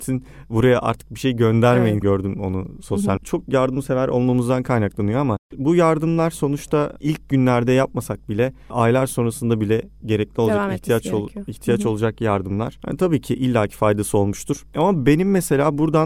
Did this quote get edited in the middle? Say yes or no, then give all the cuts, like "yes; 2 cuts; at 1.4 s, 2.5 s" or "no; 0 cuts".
yes; 2 cuts; at 2.0 s, 3.2 s